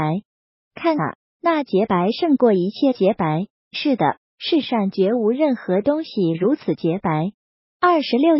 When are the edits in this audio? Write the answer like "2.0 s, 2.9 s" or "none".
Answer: none